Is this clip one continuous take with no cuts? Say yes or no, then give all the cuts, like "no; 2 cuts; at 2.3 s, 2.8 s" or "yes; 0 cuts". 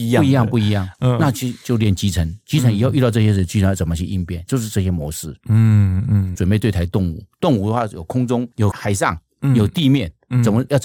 no; 3 cuts; at 4.5 s, 6.3 s, 8.7 s